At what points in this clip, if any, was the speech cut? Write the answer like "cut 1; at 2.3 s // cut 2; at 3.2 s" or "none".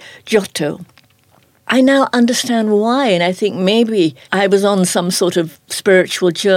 cut 1; at 4.2 s